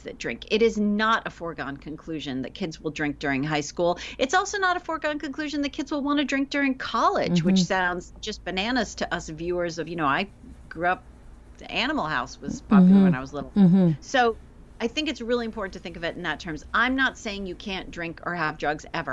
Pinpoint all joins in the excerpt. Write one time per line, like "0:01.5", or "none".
none